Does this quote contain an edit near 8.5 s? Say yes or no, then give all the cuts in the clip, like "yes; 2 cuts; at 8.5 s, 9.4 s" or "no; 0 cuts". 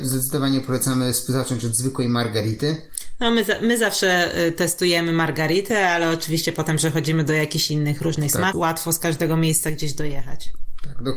yes; 1 cut; at 8.5 s